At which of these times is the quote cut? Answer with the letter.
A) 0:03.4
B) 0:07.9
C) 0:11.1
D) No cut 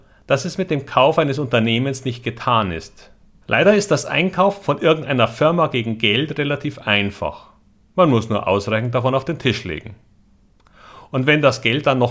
A